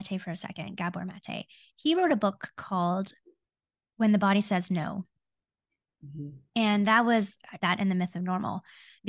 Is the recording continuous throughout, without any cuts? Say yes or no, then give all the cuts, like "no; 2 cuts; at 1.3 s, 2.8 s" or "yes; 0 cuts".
no; 1 cut; at 7.6 s